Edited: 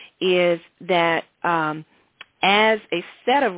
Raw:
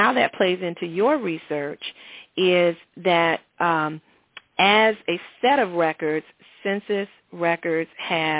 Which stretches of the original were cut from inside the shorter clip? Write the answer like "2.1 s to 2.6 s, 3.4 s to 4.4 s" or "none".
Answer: none